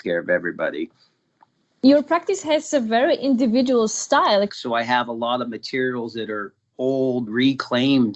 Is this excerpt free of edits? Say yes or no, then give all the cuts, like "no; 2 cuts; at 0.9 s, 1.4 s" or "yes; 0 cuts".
no; 2 cuts; at 4.5 s, 7.3 s